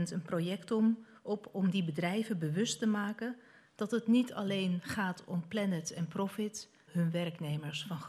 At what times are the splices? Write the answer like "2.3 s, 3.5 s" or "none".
6.9 s

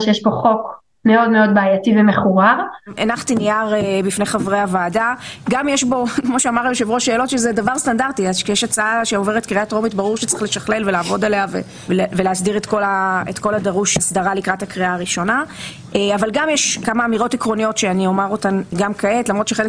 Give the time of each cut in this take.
14.0 s

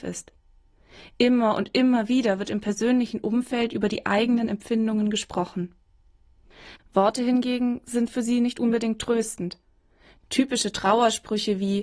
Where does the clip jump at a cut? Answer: 6.8 s

